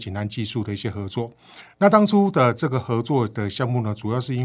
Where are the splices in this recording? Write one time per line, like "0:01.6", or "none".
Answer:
0:01.7

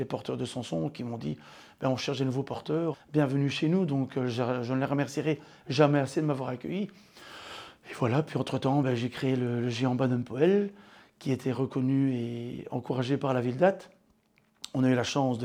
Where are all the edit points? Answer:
0:02.9

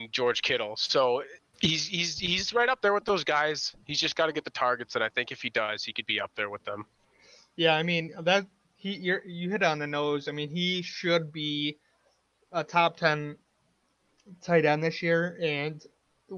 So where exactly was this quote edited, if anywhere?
none

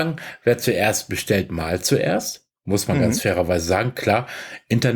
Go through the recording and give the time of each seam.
none

